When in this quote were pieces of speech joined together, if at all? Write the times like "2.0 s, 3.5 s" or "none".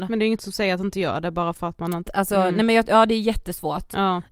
2.0 s